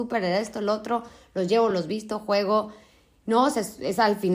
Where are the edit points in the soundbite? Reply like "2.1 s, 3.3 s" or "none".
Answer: 1.7 s